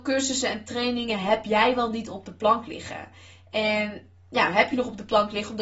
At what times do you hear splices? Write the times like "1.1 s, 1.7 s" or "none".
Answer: none